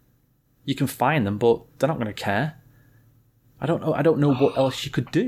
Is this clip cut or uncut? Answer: uncut